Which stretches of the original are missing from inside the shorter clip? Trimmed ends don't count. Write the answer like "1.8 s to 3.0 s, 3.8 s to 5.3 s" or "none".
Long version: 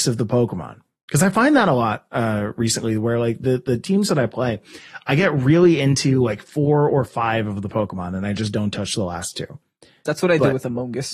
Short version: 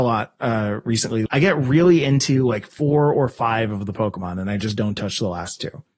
3.0 s to 5.0 s

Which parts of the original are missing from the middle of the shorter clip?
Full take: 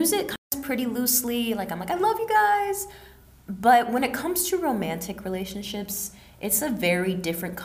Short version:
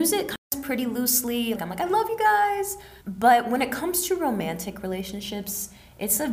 1.6 s to 1.7 s, 3.1 s to 3.4 s

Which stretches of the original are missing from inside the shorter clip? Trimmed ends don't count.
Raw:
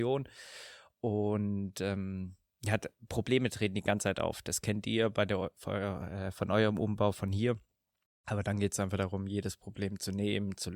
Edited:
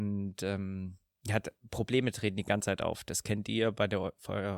none

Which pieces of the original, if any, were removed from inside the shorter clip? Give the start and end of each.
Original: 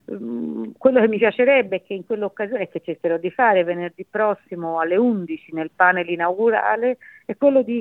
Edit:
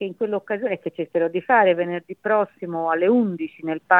none

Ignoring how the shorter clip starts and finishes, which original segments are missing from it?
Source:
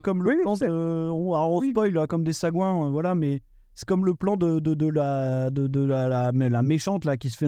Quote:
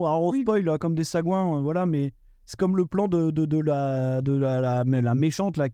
5.5 s to 5.7 s

